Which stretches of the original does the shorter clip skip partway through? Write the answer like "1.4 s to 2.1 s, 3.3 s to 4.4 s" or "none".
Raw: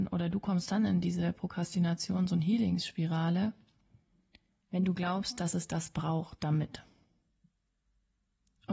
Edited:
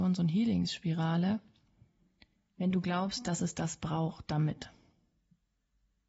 none